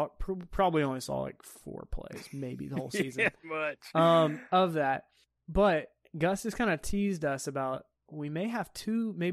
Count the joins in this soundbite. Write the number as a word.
one